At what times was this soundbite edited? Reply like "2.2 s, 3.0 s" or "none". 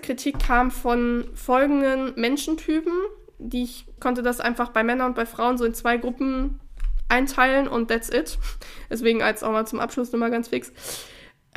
4.0 s